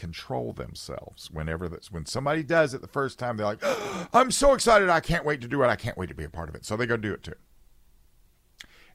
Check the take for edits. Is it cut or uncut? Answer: uncut